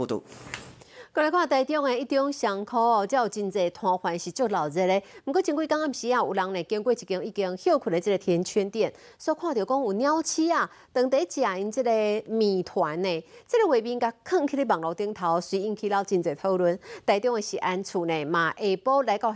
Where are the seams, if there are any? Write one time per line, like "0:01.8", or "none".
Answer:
0:08.2